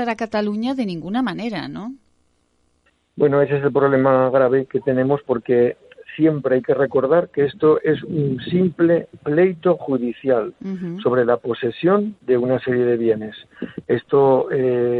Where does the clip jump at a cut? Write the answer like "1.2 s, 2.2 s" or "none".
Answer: none